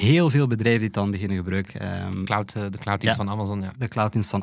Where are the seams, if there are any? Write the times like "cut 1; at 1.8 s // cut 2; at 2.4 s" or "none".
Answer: cut 1; at 1.7 s